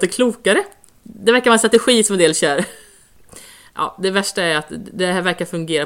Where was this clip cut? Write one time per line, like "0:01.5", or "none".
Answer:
none